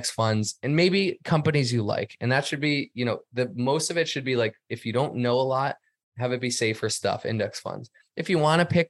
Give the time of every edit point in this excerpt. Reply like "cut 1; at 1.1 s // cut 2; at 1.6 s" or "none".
none